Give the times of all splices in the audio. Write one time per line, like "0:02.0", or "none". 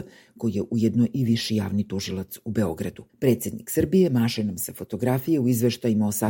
0:03.1